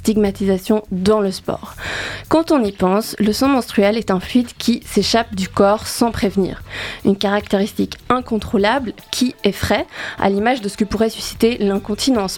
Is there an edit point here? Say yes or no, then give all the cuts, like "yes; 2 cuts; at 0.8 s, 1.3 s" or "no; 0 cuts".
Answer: no; 0 cuts